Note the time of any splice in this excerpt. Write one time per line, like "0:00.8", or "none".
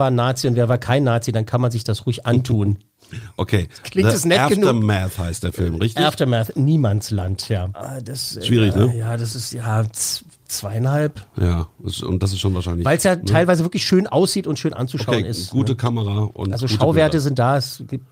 0:07.7